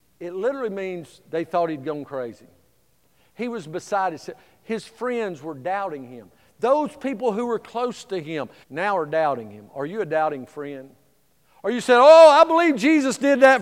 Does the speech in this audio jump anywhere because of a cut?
yes; 1 cut; at 8.6 s

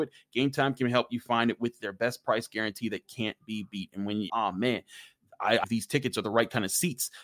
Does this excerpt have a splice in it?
yes; 2 cuts; at 4.3 s, 5.6 s

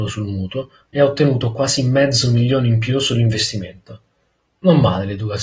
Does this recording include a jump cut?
no; 0 cuts

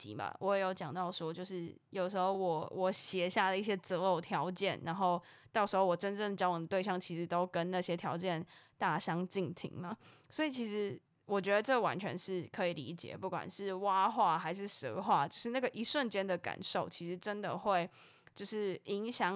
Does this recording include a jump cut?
no; 0 cuts

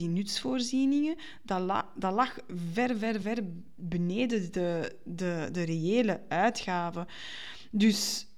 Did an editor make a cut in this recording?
no; 0 cuts

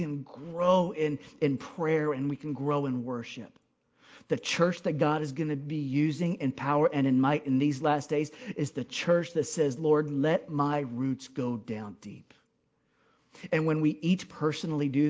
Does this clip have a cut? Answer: no; 0 cuts

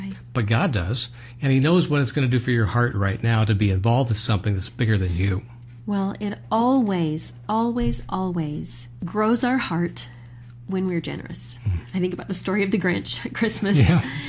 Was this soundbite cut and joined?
no; 0 cuts

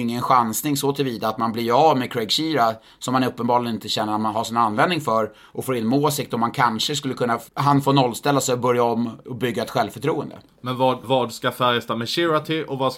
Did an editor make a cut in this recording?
yes; 2 cuts; at 7.5 s, 11.0 s

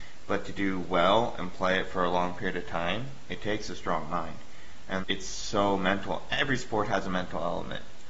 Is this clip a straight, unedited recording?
no; 1 cut; at 5.0 s

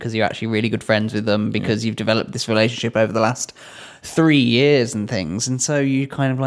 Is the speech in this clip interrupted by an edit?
no; 0 cuts

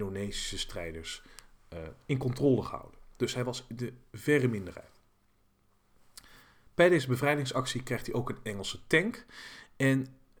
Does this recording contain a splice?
no; 0 cuts

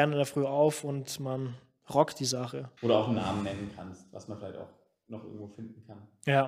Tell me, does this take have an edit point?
yes; 1 cut; at 2.8 s

